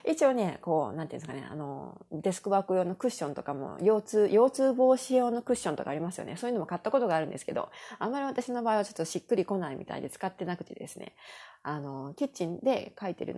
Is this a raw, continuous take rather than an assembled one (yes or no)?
yes